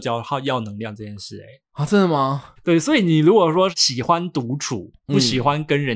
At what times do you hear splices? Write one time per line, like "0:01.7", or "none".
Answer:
0:02.6